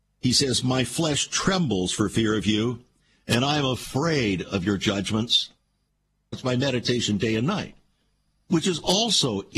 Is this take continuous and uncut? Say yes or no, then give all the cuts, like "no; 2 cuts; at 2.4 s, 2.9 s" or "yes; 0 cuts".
no; 1 cut; at 6.3 s